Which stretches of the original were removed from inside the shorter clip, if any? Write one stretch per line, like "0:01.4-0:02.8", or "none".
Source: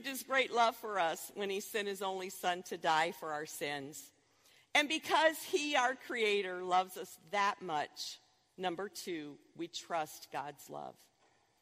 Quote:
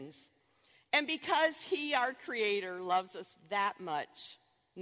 none